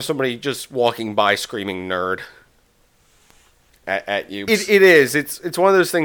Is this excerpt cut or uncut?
cut